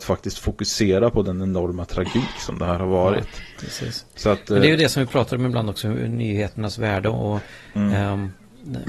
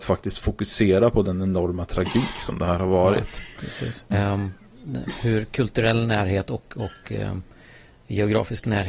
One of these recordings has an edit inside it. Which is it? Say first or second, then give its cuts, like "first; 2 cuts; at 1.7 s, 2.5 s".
second; 1 cut; at 4.1 s